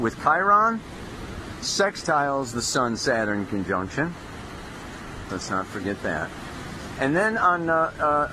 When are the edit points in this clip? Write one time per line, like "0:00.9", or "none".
0:05.3